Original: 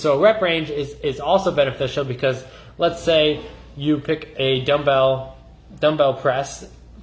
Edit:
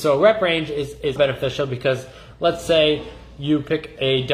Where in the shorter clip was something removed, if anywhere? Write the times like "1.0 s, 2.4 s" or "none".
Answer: 1.2 s